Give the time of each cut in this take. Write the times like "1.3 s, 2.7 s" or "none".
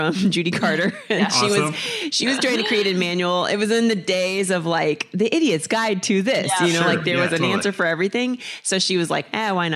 none